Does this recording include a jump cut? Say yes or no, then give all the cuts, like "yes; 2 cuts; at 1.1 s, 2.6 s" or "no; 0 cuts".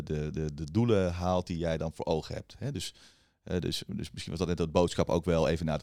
no; 0 cuts